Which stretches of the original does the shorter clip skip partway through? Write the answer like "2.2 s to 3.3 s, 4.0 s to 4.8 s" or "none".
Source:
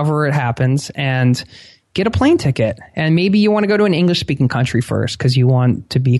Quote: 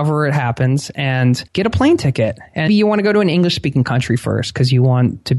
1.5 s to 1.9 s, 3.1 s to 3.3 s